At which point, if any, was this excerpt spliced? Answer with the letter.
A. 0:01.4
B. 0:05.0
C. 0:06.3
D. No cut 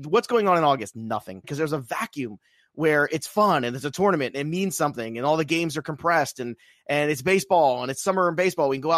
A